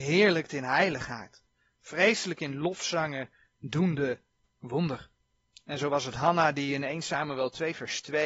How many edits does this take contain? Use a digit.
0